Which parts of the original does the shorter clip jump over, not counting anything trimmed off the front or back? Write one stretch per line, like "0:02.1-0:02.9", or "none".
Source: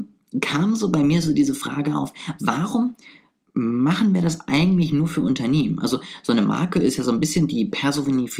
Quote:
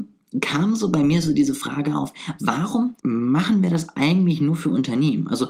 0:03.0-0:03.5